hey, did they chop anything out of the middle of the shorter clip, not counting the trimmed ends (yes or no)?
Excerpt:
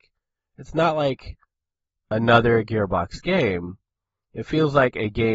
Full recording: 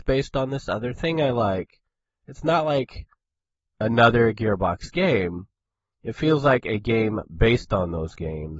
no